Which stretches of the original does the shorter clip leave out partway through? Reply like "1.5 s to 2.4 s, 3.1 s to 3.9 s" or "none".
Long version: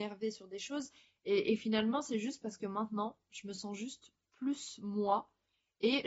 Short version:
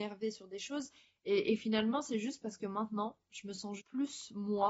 3.8 s to 4.2 s